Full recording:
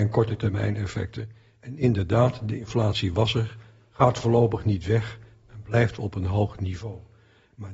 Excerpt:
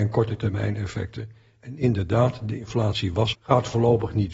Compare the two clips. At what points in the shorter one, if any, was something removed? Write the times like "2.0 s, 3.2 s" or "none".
3.3 s